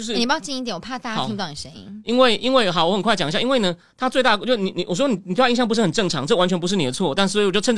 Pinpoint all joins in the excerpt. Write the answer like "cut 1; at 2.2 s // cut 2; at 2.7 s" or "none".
none